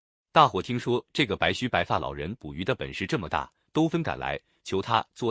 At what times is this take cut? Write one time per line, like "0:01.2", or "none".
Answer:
0:03.9